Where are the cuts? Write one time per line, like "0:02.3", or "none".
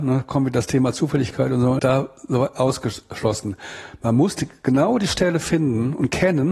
0:01.8